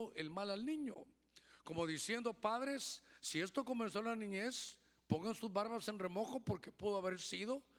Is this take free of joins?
yes; 0 cuts

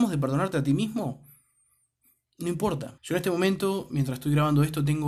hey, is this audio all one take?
no; 1 cut; at 3.0 s

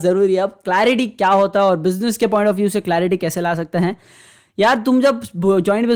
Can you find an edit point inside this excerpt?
no; 0 cuts

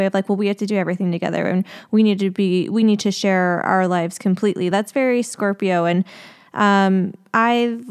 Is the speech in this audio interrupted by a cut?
no; 0 cuts

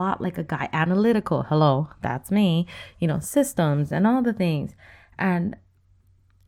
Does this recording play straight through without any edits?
yes; 0 cuts

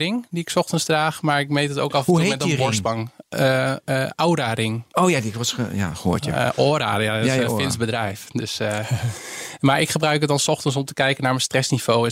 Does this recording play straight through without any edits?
yes; 0 cuts

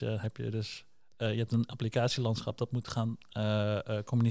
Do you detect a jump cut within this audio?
no; 0 cuts

